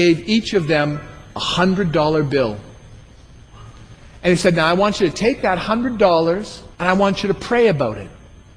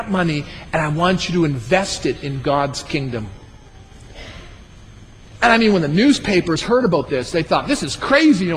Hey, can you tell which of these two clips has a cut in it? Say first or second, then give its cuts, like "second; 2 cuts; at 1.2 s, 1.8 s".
first; 1 cut; at 6.7 s